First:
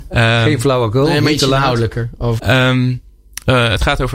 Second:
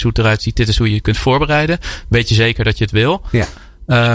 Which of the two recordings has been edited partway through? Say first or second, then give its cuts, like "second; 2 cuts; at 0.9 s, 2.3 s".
first; 1 cut; at 2.4 s